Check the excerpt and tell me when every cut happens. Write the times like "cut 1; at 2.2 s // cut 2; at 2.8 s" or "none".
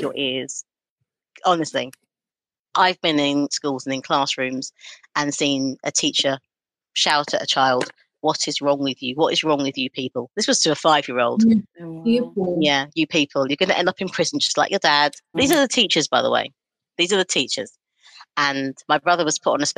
cut 1; at 15.3 s